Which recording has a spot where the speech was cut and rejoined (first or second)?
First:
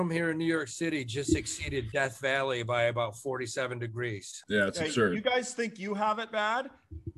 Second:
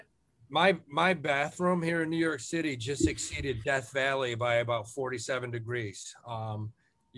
first